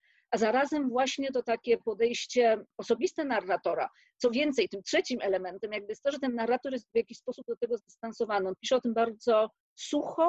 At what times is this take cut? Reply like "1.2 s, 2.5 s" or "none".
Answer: none